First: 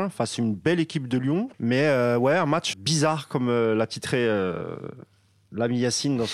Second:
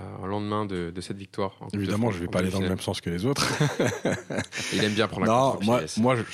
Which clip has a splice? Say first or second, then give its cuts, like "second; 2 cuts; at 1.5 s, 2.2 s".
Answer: first; 2 cuts; at 1.5 s, 2.7 s